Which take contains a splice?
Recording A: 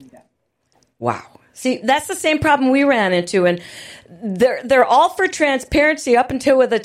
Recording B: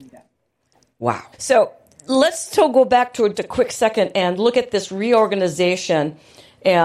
B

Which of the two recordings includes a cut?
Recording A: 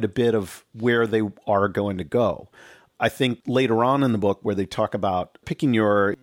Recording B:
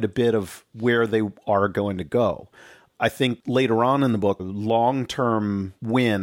B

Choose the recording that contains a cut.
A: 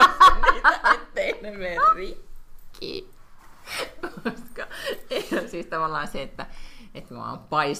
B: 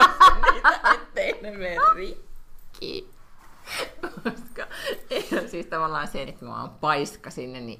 B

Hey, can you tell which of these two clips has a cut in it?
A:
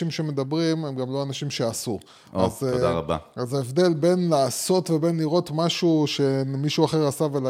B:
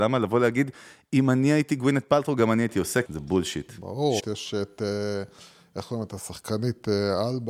B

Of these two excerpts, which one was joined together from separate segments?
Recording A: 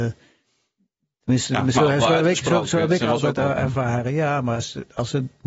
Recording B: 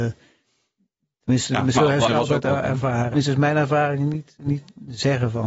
B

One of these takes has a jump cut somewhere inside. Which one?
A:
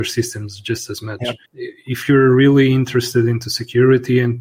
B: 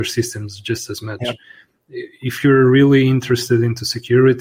A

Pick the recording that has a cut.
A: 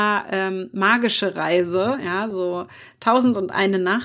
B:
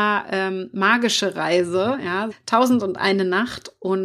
B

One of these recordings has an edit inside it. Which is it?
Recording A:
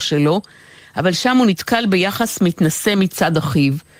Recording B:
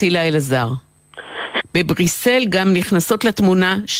B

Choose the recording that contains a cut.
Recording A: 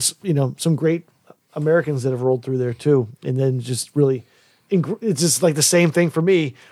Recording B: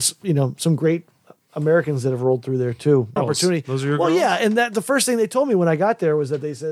B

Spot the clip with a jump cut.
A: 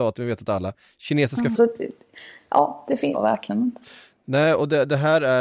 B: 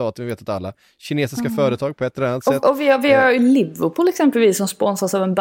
A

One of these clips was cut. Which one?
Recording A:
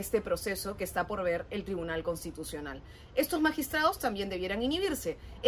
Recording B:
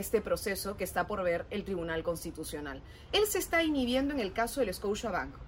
B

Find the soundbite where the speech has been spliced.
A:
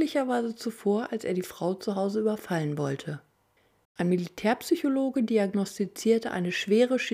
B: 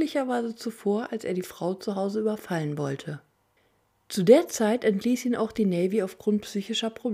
A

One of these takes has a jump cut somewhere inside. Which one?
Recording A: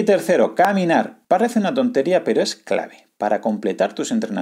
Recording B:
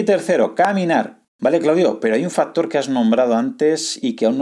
B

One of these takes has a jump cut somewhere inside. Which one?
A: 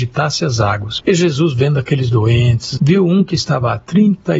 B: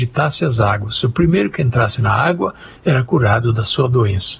A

